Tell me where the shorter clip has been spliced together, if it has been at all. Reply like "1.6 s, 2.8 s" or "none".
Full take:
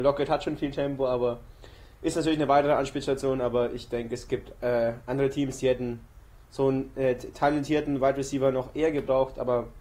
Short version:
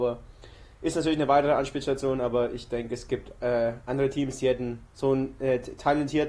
4.9 s